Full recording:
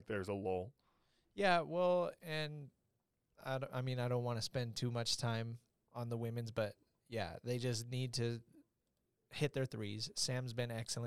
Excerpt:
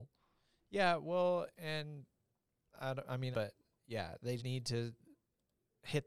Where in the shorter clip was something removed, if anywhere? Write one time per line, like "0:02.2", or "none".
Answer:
0:03.3
0:04.4